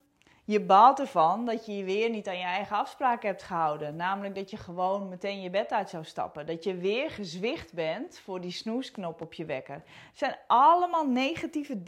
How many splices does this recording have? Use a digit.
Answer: 0